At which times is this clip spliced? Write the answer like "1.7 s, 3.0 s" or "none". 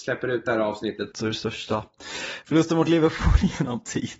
1.1 s